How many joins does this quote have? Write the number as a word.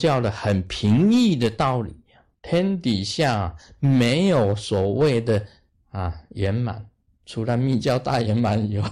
one